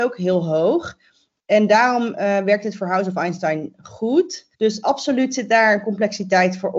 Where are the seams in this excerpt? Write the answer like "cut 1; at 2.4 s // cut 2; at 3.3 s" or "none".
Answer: cut 1; at 4.5 s